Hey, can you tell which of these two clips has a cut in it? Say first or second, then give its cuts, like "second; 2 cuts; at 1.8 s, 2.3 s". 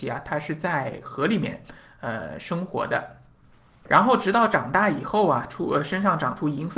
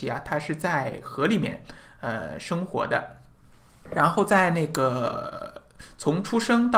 first; 1 cut; at 3.9 s